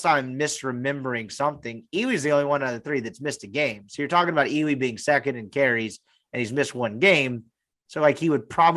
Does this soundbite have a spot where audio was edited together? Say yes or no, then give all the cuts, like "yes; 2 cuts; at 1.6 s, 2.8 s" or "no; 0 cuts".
no; 0 cuts